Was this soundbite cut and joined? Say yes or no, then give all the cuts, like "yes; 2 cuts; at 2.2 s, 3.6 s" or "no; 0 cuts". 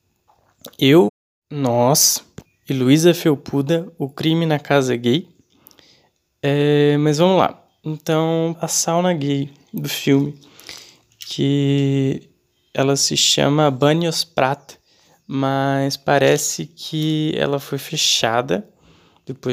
yes; 1 cut; at 8.5 s